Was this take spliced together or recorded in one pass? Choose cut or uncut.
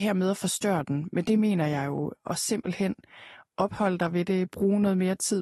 uncut